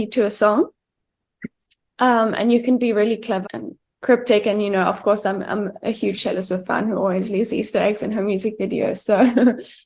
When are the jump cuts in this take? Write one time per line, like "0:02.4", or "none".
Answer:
0:03.4

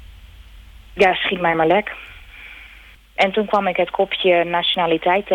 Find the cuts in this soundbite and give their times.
0:03.0

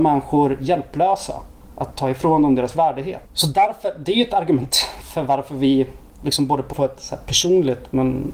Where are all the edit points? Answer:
0:03.3
0:06.7

